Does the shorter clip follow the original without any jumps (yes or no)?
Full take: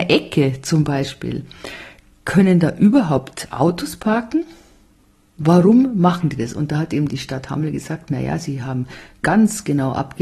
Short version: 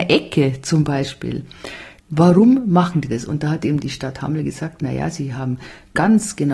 no